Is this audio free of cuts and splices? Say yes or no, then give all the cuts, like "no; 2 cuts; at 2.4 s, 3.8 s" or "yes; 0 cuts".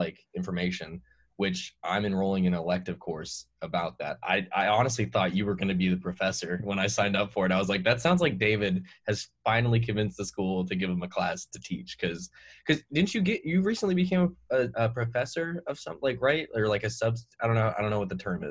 yes; 0 cuts